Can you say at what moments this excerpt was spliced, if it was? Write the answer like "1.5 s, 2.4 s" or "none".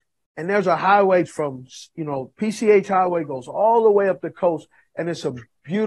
1.2 s